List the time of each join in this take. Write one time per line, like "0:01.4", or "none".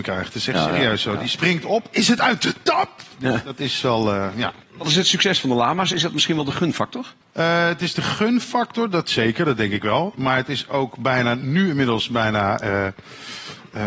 0:07.2

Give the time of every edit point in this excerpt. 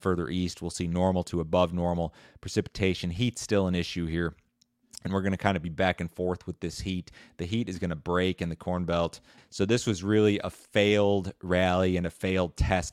0:09.4

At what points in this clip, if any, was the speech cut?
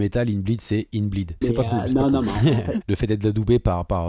0:01.4
0:02.8

